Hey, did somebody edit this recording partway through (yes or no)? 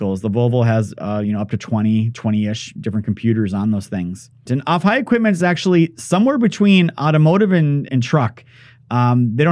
yes